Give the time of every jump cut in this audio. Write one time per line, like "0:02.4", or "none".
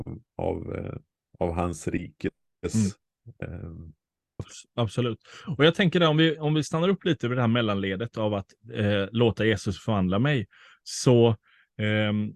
0:04.4